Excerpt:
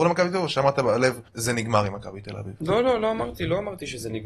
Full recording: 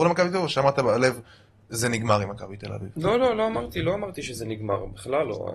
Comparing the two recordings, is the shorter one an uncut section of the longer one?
no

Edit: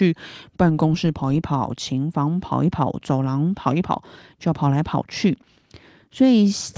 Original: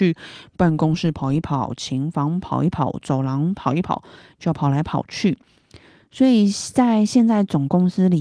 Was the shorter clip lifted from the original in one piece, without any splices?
yes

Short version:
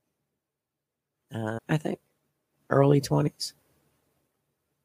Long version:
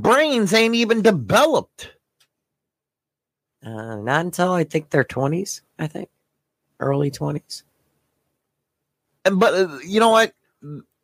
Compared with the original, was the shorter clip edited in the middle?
yes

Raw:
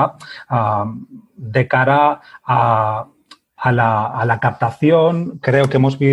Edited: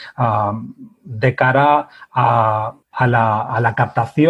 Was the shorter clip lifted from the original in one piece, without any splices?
no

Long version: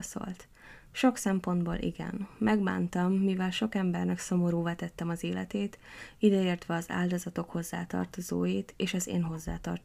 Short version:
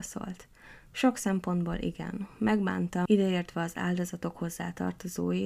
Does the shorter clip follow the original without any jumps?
no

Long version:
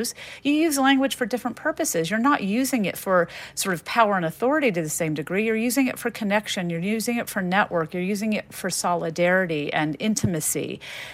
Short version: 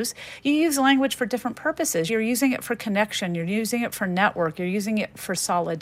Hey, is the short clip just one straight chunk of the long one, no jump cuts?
no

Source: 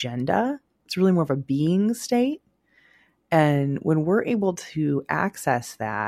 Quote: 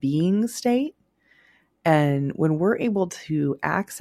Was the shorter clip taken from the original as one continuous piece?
yes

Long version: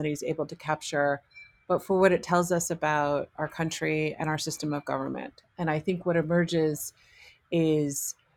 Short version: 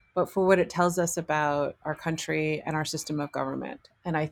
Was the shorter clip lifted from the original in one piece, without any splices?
yes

